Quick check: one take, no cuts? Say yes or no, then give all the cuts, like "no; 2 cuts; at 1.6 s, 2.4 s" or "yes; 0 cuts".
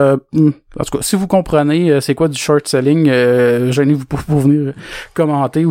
yes; 0 cuts